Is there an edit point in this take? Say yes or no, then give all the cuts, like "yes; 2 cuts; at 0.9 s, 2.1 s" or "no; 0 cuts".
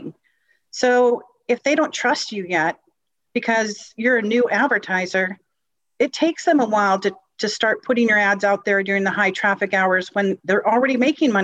no; 0 cuts